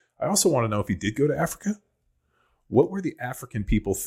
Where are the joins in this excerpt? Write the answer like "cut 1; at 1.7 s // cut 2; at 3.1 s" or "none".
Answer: none